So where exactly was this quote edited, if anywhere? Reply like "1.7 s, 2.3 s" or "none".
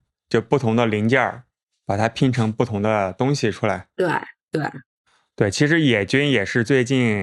none